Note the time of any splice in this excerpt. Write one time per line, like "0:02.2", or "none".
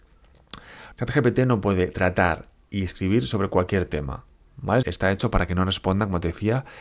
0:00.9
0:04.8

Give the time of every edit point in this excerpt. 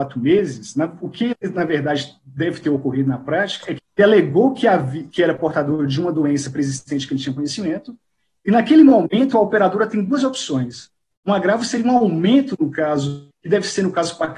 0:03.8
0:11.1
0:13.3

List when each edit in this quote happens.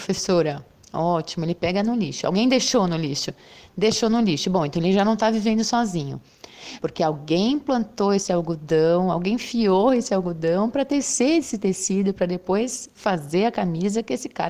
0:06.8

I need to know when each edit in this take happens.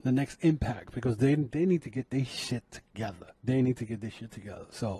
0:03.4

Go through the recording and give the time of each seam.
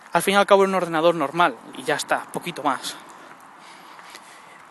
0:01.7

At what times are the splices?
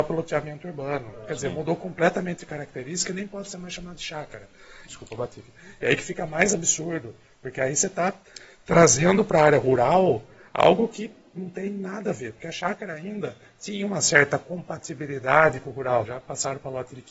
0:04.9
0:16.0

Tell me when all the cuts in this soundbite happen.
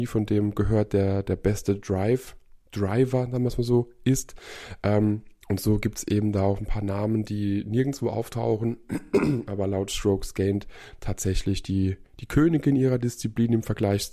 none

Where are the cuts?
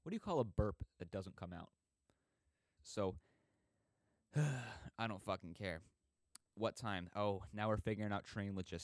0:02.8

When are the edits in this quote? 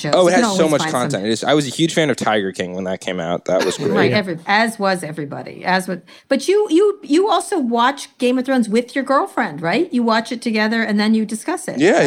none

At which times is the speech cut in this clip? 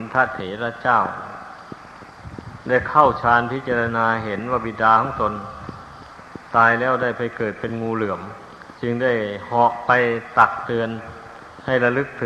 0:08.8

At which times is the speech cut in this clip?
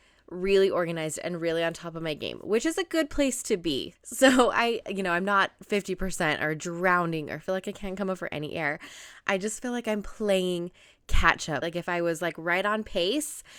0:04.0
0:11.6

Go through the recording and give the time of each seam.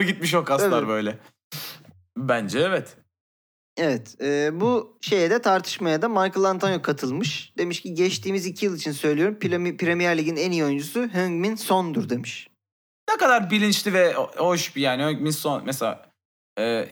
none

